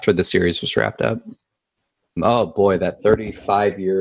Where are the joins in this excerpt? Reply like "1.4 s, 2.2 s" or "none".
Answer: 2.2 s